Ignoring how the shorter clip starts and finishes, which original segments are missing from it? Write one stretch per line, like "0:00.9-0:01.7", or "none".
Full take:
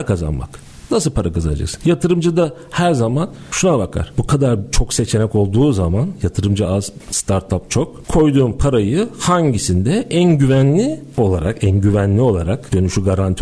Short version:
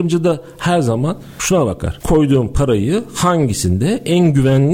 0:04.1-0:08.0